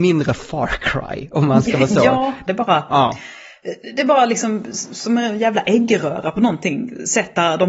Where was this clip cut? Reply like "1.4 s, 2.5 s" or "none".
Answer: 2.5 s